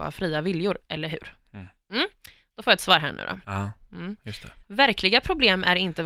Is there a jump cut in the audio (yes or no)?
yes